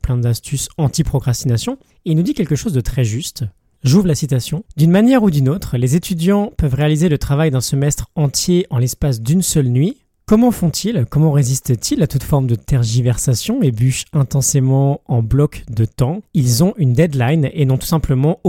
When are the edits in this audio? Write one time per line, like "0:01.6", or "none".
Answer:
none